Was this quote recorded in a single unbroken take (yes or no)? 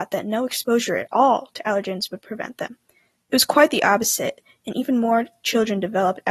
yes